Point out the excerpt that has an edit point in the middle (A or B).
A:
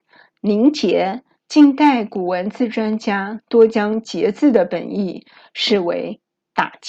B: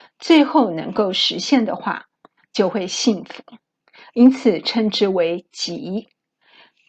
A